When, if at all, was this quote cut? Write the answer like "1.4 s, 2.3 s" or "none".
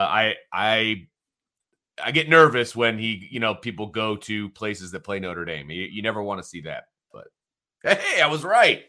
none